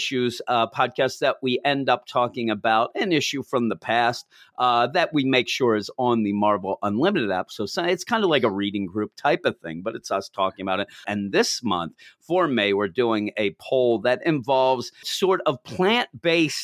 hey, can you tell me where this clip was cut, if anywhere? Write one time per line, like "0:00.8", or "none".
0:11.0
0:15.0